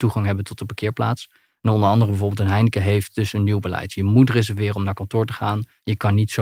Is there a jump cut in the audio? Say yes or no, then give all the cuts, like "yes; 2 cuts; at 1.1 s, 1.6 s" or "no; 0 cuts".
no; 0 cuts